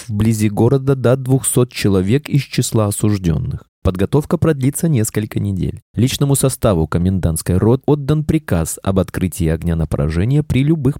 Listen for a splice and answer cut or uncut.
cut